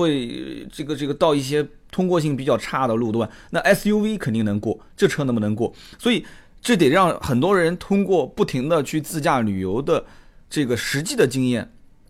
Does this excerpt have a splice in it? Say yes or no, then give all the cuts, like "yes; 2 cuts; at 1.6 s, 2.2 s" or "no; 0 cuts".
no; 0 cuts